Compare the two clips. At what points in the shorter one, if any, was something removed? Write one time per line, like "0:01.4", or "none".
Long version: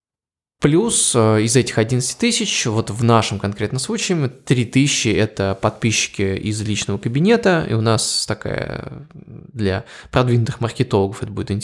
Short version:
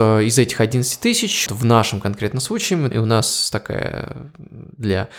0:01.5
0:02.9